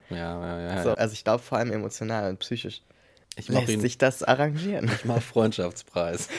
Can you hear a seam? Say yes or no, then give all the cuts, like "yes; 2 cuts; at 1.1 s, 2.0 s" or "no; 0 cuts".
yes; 2 cuts; at 0.9 s, 3.2 s